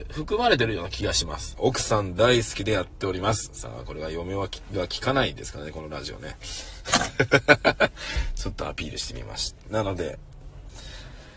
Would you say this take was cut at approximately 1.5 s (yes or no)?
yes